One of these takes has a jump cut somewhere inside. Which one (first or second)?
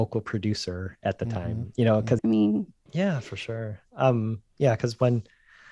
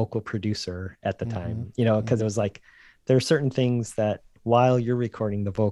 first